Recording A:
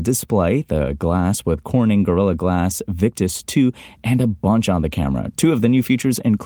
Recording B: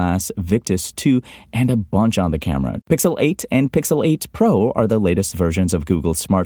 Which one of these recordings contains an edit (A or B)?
B